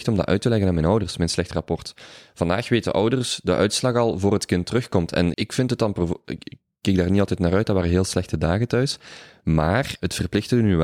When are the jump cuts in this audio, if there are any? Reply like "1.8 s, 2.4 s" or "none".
5.3 s